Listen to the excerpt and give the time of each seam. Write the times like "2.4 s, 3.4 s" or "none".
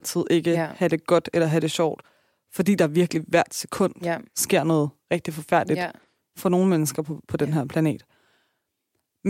none